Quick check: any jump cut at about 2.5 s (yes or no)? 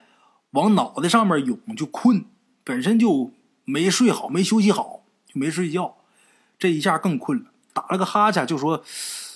no